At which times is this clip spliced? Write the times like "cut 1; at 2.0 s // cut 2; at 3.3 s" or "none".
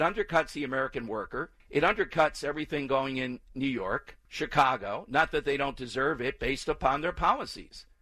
cut 1; at 1.6 s // cut 2; at 4.3 s